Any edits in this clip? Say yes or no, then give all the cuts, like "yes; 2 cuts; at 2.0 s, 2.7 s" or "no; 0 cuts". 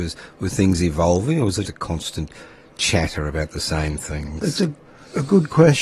yes; 1 cut; at 1.6 s